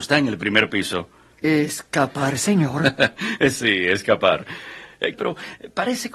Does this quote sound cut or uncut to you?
cut